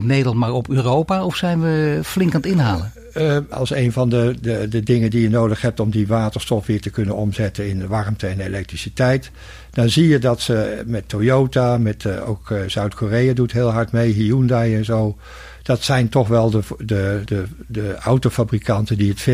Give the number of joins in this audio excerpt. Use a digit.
2